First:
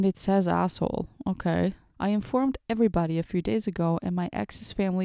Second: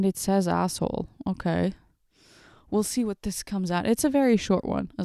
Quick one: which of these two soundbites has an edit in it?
first; 1 cut; at 1.9 s

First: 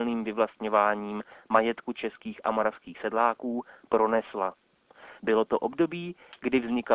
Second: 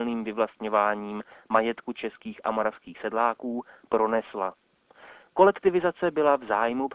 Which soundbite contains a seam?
first; 1 cut; at 5.2 s

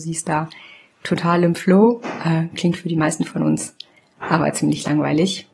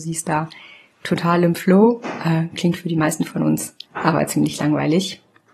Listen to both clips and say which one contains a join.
second; 1 cut; at 3.8 s

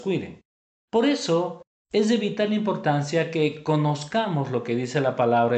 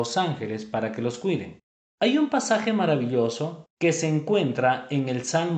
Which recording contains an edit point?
second; 2 cuts; at 1.8 s, 3.7 s

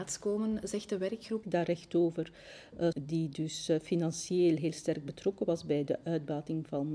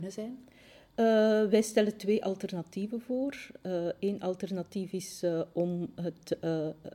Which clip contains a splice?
first; 2 cuts; at 1.4 s, 2.9 s

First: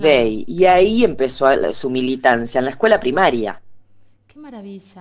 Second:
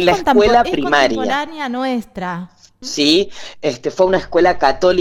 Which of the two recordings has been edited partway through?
second; 1 cut; at 2.8 s

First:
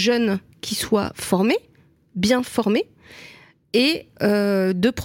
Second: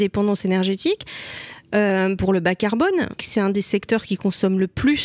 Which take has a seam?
second; 1 cut; at 3.2 s

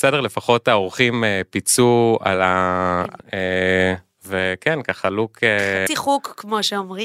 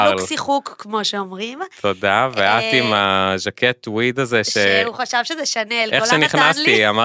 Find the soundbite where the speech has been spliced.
first; 2 cuts; at 3.2 s, 5.9 s

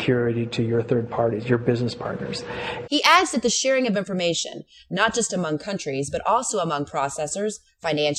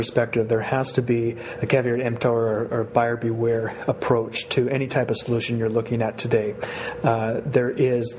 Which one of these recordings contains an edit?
first; 1 cut; at 2.9 s

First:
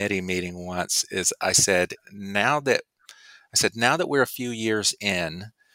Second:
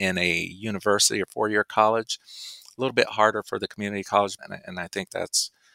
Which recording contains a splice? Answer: second; 1 cut; at 4.4 s

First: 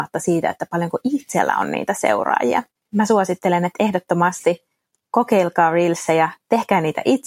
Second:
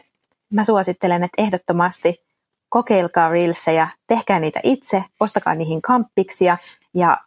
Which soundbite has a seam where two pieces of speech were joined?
first; 1 cut; at 2.8 s

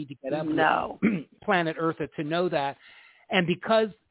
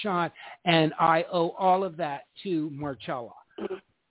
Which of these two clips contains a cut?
first; 1 cut; at 1.0 s

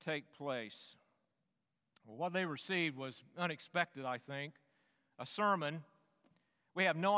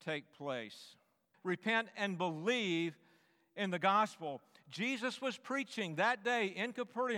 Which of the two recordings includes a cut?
second; 1 cut; at 1.3 s

